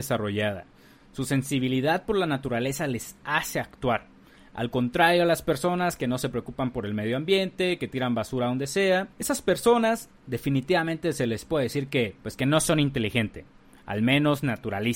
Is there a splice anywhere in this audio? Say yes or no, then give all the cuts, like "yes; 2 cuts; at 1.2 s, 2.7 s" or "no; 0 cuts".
yes; 2 cuts; at 9.1 s, 12.2 s